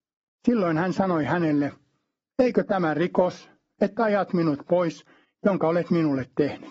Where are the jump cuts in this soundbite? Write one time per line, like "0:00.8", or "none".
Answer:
0:05.2